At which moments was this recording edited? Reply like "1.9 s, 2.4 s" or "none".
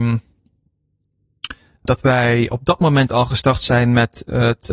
1.9 s